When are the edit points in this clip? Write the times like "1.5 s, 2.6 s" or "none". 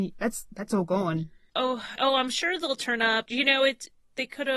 2.0 s, 3.3 s